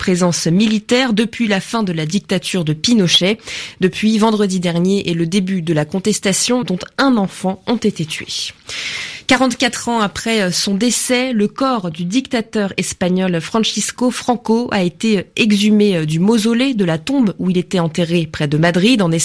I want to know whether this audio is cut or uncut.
cut